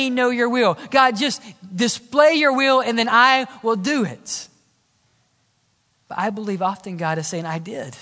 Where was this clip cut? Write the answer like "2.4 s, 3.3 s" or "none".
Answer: none